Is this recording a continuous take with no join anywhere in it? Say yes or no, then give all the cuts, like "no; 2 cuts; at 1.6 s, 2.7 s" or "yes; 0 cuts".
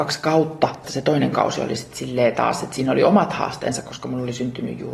yes; 0 cuts